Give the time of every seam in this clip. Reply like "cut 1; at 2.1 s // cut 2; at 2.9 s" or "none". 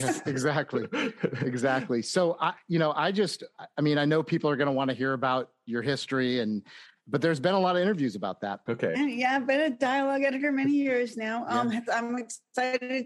cut 1; at 8.7 s // cut 2; at 11.9 s